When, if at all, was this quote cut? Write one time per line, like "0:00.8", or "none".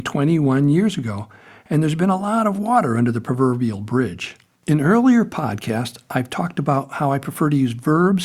0:04.6